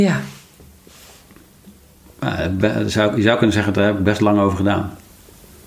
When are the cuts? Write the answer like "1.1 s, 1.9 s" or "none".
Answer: 2.0 s